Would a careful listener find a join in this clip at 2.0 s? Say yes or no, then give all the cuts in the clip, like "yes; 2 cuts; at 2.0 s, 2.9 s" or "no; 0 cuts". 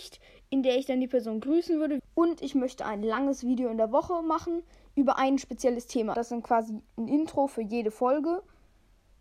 yes; 2 cuts; at 2.0 s, 6.1 s